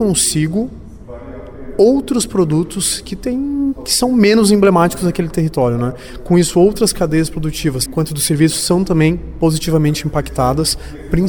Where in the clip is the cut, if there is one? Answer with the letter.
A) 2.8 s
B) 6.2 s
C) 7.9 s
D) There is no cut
C